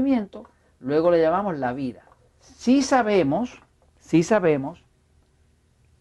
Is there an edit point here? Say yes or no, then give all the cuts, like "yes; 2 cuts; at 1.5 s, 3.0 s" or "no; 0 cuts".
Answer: yes; 1 cut; at 2.4 s